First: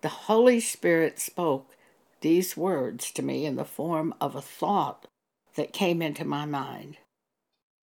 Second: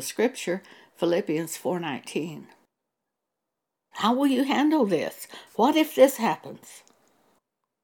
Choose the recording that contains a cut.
second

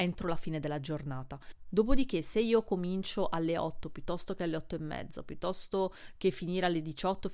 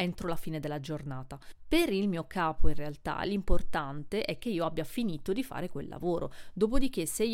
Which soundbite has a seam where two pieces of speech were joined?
first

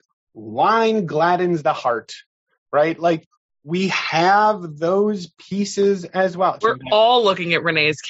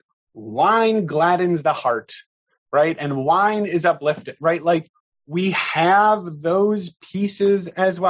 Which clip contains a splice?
first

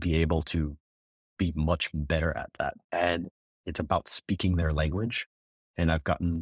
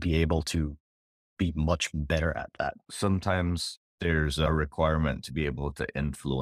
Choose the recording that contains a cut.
second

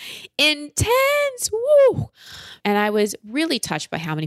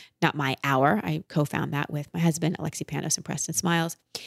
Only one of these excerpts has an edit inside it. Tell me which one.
first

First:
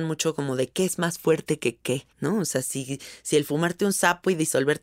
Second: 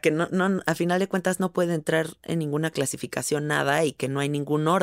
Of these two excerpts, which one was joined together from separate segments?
first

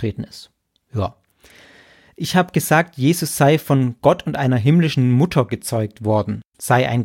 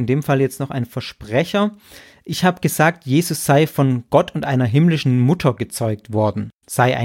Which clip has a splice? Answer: first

